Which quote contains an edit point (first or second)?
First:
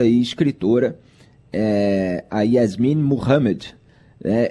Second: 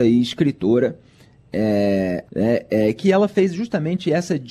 second